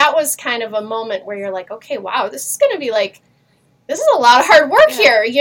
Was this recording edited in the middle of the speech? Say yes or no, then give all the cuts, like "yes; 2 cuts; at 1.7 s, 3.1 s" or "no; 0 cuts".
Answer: no; 0 cuts